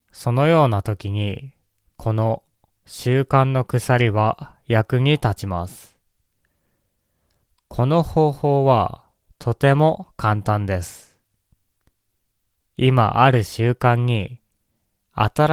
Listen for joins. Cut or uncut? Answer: uncut